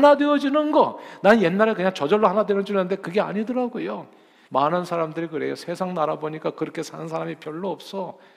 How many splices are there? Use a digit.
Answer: 1